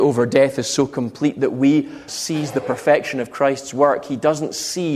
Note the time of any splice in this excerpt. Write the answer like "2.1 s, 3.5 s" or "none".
2.1 s